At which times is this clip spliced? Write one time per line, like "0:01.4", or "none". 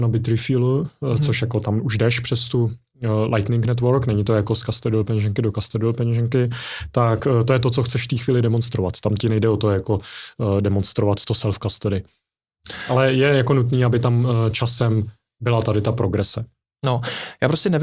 none